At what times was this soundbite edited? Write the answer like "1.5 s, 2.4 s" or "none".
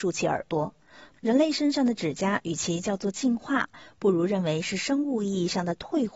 1.1 s